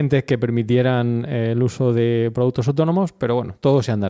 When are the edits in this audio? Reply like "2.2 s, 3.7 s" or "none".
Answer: none